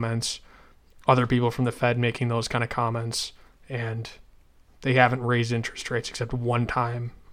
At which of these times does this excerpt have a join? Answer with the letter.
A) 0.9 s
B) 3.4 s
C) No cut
C